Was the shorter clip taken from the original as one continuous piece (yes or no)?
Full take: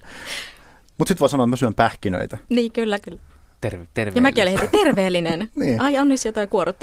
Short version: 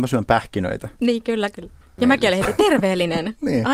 no